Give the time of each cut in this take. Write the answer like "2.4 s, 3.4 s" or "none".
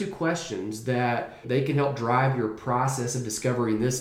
1.4 s